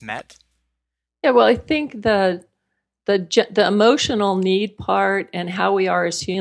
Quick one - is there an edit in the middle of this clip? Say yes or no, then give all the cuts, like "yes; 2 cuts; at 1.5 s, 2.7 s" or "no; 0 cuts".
no; 0 cuts